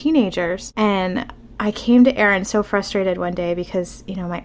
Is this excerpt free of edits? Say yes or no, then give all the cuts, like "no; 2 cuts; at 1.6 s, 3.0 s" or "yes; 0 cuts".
yes; 0 cuts